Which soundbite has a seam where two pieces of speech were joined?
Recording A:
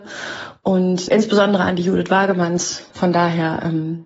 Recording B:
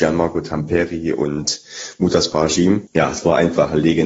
A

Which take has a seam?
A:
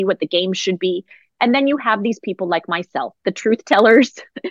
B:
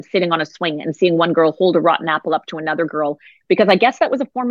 B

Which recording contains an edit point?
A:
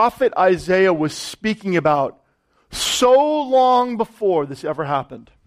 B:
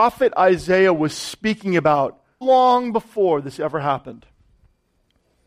B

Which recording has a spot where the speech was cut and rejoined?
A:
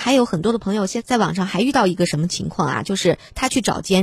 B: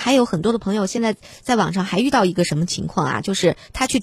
A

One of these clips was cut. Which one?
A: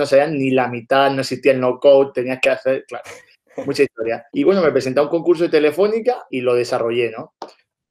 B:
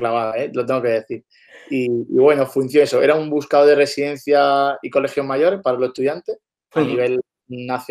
A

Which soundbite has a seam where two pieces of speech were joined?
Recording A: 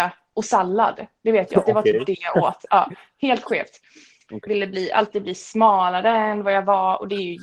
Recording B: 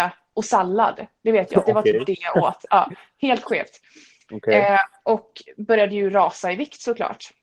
A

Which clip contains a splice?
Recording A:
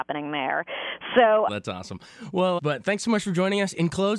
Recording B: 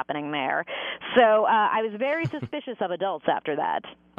A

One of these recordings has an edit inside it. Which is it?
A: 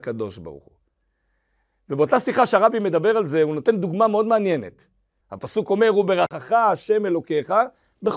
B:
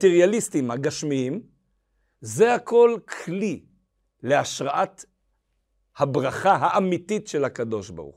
A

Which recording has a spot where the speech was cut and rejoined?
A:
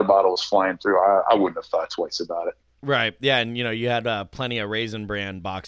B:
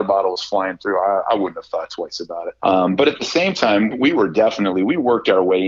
B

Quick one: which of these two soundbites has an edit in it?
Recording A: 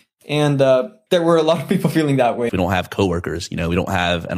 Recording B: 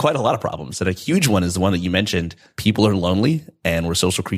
A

